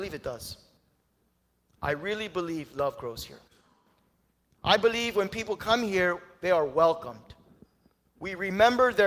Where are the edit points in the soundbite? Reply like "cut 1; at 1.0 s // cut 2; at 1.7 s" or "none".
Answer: none

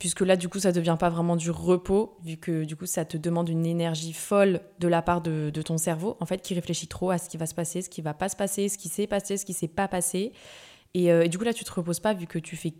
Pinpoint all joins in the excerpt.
none

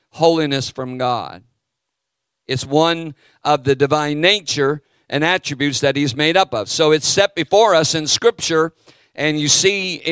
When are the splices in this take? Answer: none

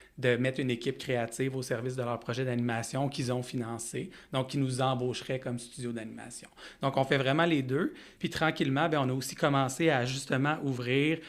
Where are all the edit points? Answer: none

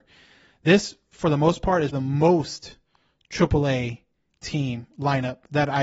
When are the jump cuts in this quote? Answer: cut 1; at 1.9 s

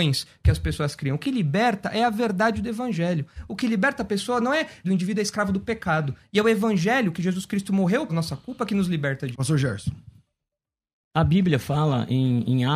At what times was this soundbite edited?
cut 1; at 4.8 s // cut 2; at 8.1 s // cut 3; at 9.3 s

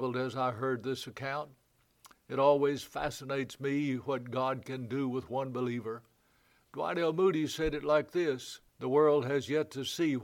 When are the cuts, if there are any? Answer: cut 1; at 8.7 s

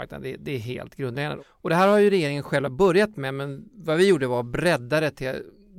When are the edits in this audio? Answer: cut 1; at 1.4 s

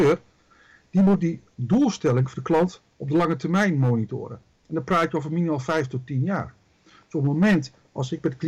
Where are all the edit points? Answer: none

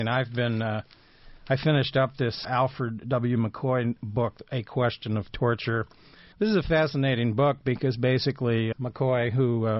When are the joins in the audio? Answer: cut 1; at 2.4 s // cut 2; at 6.3 s // cut 3; at 8.7 s

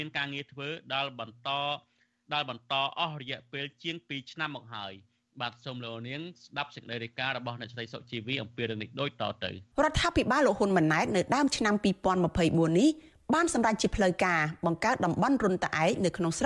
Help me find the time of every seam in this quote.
cut 1; at 9.7 s

